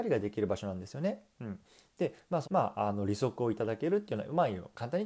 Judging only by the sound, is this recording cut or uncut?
cut